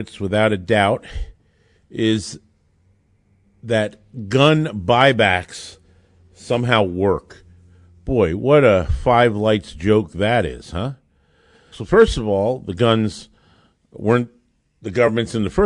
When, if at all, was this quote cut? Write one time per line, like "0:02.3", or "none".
0:11.7